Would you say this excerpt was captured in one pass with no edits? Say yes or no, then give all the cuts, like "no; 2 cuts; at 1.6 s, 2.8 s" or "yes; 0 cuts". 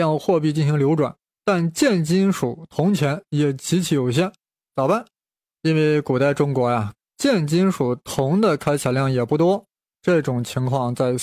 no; 2 cuts; at 5.5 s, 7.0 s